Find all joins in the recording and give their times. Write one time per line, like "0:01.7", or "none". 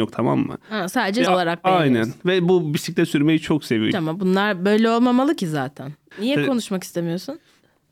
0:01.3
0:03.9
0:06.1

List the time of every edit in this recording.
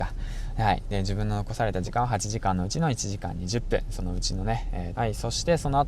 0:04.9

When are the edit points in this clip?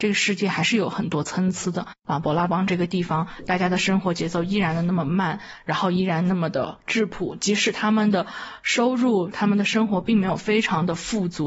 none

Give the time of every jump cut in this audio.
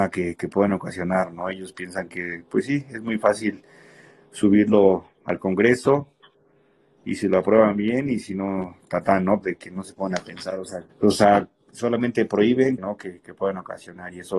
0:09.4
0:10.9
0:12.8

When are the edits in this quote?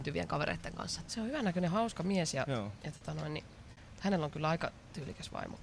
0:01.1

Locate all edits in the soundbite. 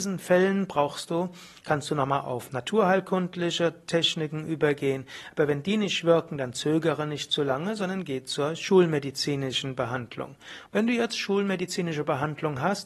0:10.7

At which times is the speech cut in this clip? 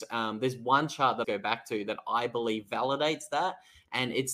0:01.2

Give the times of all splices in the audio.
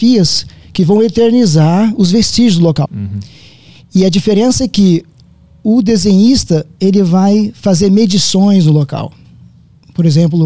0:02.9

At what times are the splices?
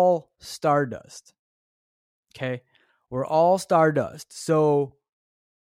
none

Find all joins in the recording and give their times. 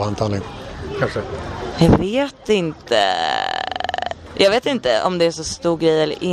0:04.3

